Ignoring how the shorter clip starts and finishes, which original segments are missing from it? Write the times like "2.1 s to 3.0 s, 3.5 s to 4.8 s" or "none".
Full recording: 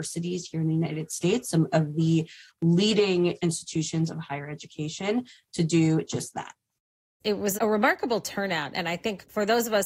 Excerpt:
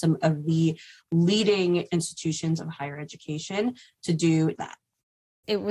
6.1 s to 6.3 s